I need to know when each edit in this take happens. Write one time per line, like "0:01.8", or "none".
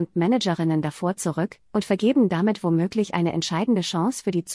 0:01.7